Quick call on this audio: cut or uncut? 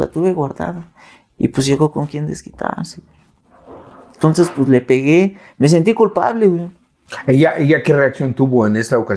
uncut